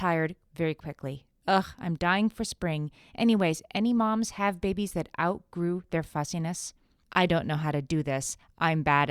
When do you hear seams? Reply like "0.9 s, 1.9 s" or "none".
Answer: 7.0 s